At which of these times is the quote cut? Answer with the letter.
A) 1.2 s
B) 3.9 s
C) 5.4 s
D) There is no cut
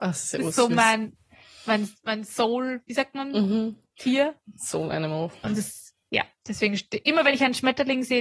C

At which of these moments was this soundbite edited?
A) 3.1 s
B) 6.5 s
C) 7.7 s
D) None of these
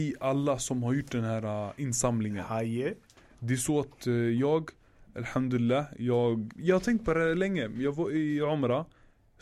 B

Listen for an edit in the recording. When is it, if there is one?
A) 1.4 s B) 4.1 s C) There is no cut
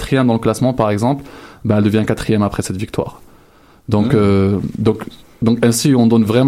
C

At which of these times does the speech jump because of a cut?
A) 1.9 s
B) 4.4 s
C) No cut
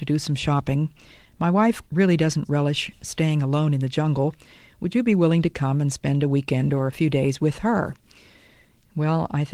A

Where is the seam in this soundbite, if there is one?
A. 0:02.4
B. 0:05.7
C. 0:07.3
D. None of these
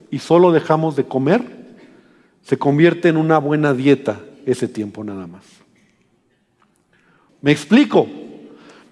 C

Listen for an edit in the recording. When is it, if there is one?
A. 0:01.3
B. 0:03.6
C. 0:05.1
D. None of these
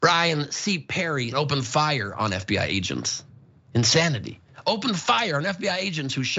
A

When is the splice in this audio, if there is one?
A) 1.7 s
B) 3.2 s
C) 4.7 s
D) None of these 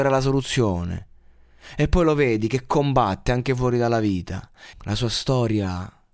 C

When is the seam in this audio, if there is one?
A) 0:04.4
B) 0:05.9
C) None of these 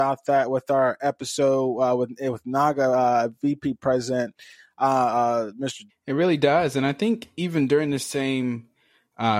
B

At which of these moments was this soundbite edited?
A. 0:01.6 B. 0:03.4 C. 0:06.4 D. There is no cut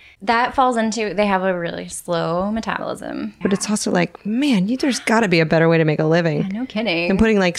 B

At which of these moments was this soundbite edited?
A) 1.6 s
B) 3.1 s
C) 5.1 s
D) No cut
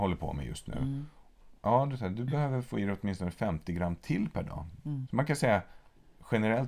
C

